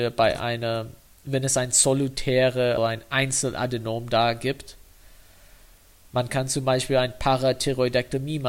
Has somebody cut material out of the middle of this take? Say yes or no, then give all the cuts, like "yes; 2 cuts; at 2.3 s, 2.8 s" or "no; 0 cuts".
yes; 1 cut; at 2.8 s